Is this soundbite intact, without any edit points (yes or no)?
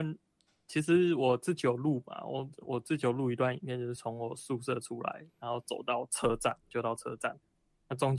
yes